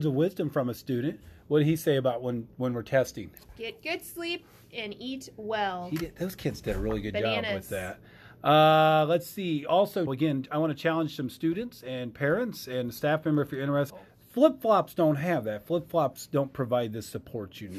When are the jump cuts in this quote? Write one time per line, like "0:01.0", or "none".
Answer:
0:10.1
0:13.9